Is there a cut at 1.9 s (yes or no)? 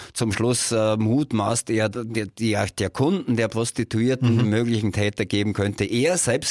yes